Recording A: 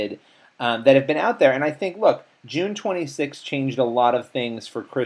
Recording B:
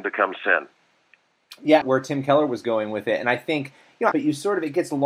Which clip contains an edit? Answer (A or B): B